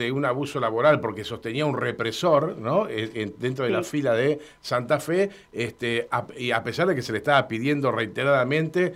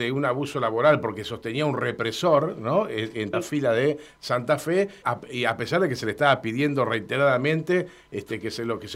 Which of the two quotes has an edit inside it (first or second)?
second